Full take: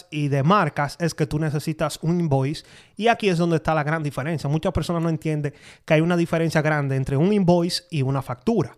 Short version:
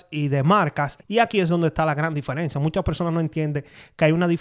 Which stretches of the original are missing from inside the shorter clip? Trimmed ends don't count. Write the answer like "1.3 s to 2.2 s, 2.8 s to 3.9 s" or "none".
1.0 s to 2.9 s